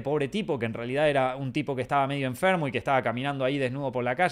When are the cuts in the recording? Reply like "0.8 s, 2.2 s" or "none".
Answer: none